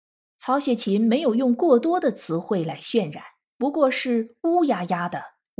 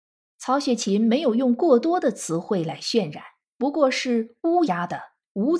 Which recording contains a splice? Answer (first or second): second